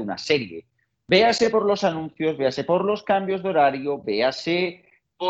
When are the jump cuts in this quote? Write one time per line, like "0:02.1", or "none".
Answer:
none